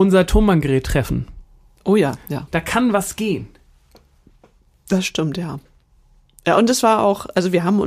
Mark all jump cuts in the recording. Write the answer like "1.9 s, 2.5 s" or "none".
2.5 s